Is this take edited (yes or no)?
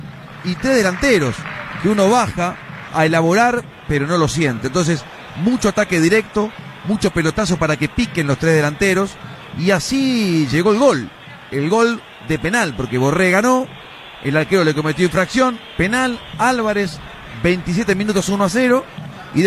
yes